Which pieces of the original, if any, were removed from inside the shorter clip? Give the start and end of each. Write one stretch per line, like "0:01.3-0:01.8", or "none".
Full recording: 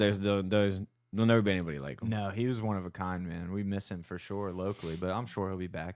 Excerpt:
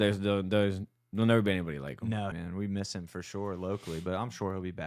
0:02.3-0:03.3